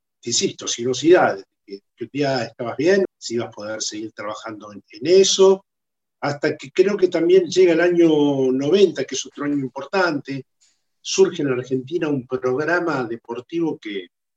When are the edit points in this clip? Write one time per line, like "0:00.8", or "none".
0:03.1
0:04.8